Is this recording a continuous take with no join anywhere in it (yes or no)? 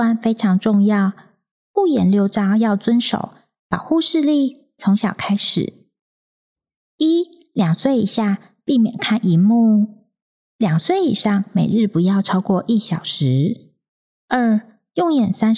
yes